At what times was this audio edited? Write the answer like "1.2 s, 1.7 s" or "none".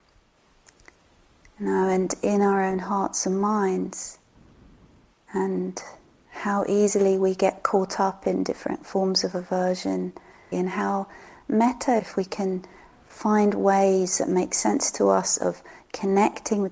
10.5 s, 12.0 s